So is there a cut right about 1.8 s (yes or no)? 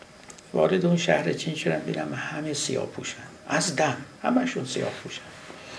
no